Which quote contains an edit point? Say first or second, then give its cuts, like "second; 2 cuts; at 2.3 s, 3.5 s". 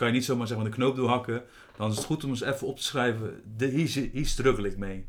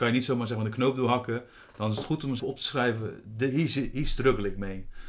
second; 1 cut; at 2.4 s